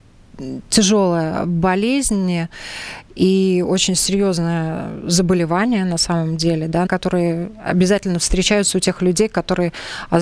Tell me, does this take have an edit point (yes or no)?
yes